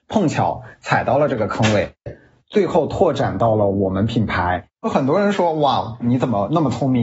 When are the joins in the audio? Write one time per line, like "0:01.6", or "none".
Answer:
0:02.1
0:05.3